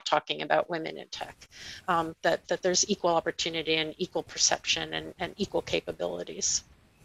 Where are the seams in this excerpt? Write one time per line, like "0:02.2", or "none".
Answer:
none